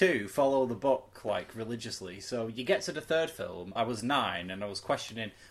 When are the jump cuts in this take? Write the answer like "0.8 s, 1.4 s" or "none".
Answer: 3.8 s